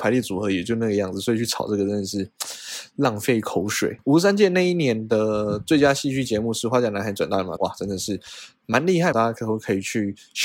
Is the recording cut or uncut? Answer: cut